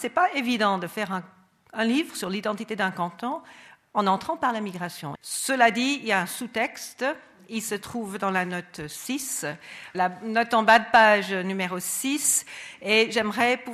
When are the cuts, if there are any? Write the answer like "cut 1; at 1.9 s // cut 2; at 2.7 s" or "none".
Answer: cut 1; at 5.2 s // cut 2; at 9.9 s